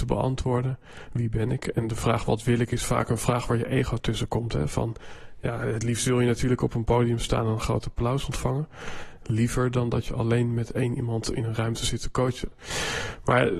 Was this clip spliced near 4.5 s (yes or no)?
no